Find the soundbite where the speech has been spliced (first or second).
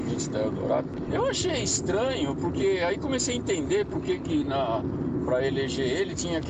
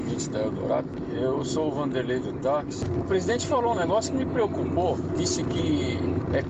first